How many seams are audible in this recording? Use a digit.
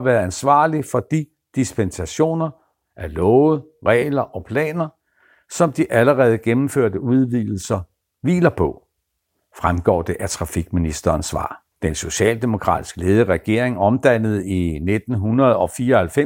1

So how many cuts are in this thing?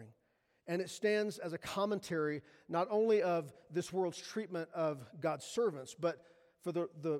0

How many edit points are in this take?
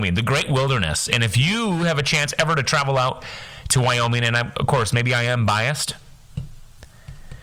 0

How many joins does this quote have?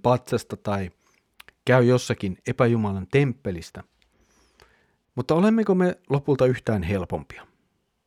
1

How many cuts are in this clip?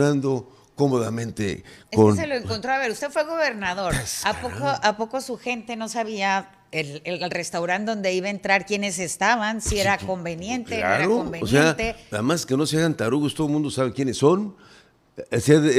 0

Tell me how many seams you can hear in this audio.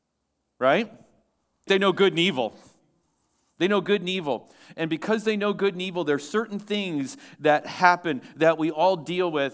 1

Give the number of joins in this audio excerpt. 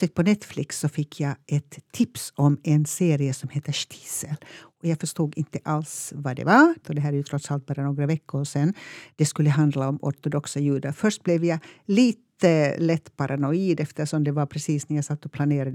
1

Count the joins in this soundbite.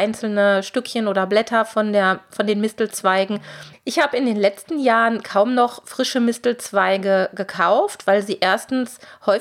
1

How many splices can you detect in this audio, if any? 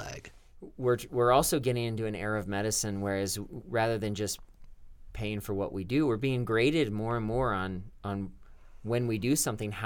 0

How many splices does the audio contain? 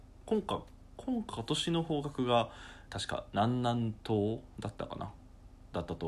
1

